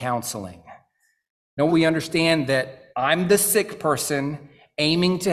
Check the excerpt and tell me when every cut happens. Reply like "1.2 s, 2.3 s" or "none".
1.7 s, 2.9 s